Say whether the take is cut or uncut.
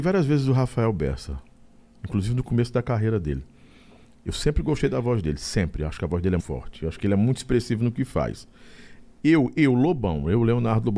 cut